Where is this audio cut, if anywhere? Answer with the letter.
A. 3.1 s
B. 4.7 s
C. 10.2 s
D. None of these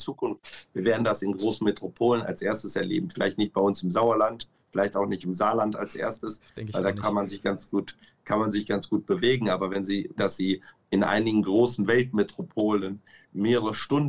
C